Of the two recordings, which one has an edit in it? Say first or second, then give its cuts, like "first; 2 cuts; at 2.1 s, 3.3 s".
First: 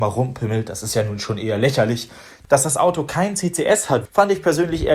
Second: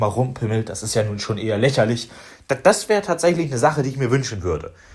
first; 2 cuts; at 2.4 s, 4.1 s